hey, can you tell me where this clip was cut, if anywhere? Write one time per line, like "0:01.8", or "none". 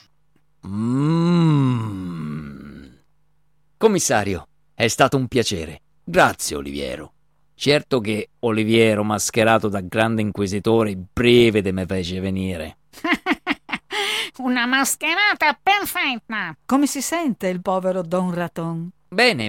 0:06.0
0:16.6

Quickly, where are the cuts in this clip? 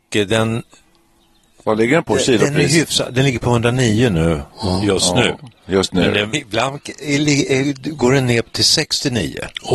0:06.3

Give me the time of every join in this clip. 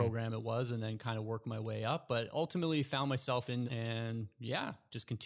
0:03.7

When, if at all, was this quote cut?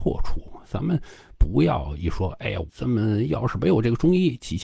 0:02.7

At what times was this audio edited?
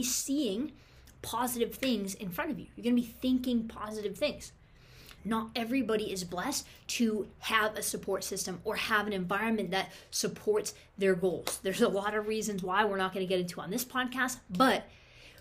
0:05.2

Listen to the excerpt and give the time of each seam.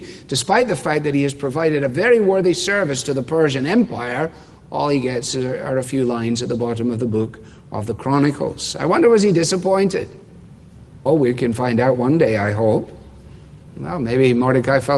0:11.1
0:13.7

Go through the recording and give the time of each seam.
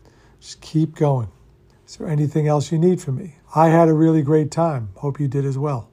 0:01.7
0:03.4

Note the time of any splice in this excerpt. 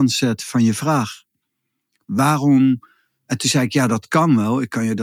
none

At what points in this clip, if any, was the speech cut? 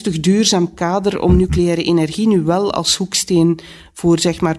none

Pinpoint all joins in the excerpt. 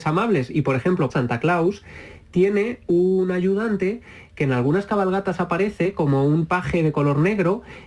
0:01.1

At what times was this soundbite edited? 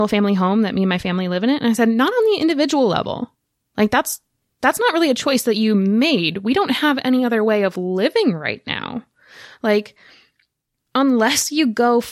none

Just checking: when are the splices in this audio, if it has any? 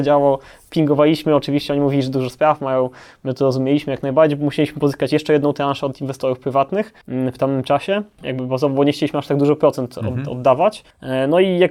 0:07.0
0:08.2

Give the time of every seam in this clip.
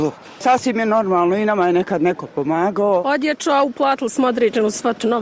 none

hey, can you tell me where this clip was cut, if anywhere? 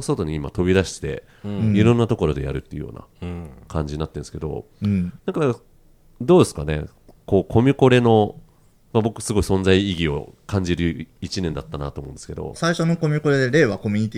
0:12.6

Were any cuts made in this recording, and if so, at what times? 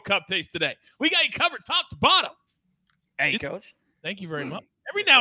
0:03.4

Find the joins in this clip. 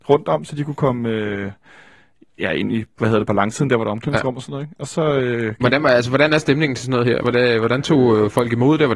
none

